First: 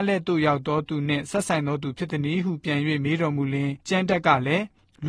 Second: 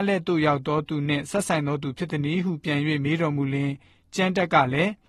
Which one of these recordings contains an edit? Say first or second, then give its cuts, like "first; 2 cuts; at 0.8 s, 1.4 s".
first; 1 cut; at 3.8 s